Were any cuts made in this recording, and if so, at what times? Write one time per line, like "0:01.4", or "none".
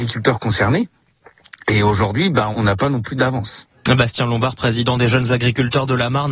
0:02.5

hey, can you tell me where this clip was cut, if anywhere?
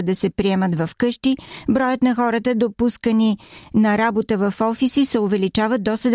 none

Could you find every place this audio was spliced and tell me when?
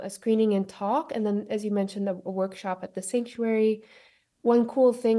none

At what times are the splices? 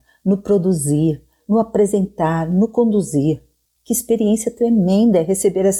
0:01.4
0:03.8

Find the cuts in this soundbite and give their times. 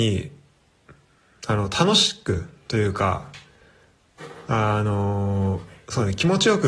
none

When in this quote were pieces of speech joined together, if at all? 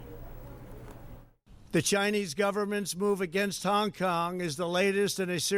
none

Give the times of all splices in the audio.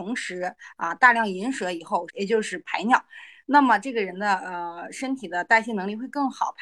0:02.1

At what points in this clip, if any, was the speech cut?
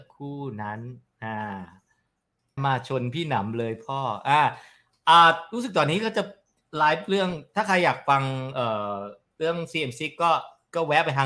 0:02.6

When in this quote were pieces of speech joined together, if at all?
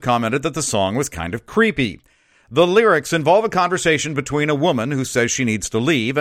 none

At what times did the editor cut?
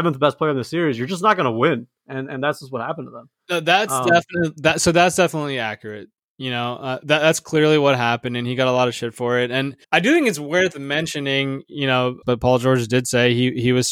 0:09.8
0:12.2

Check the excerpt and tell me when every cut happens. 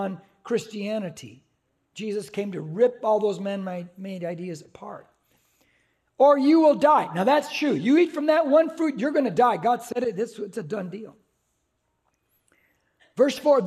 none

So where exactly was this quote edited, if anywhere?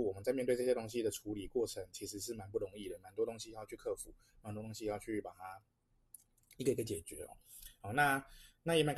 none

